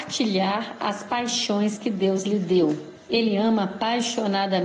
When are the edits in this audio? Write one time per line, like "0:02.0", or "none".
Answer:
0:03.1